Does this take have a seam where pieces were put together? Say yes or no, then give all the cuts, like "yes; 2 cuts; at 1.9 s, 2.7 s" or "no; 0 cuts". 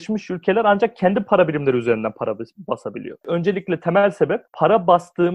yes; 1 cut; at 3.2 s